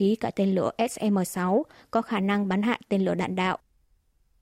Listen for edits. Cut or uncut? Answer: uncut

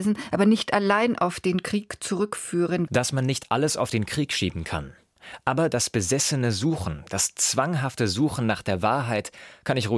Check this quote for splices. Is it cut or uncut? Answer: cut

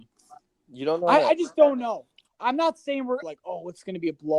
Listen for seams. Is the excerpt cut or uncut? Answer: cut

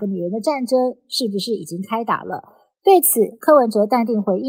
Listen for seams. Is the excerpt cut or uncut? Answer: uncut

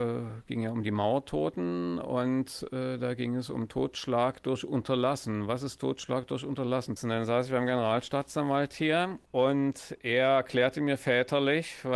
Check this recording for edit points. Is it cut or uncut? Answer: cut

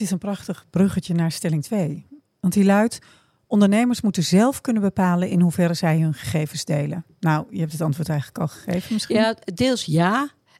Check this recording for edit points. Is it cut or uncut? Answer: uncut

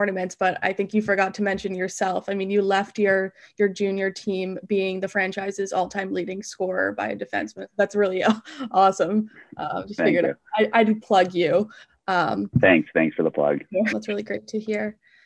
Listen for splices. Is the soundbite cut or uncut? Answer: cut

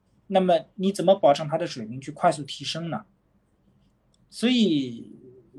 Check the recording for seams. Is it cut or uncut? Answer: uncut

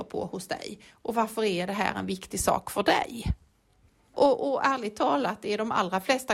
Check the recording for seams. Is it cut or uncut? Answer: uncut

